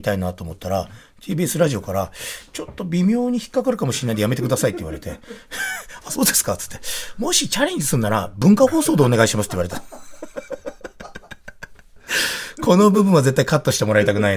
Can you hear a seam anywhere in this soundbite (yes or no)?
no